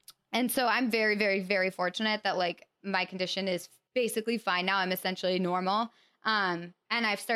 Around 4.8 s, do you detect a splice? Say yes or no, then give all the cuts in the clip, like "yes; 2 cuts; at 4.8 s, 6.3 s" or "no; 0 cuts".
no; 0 cuts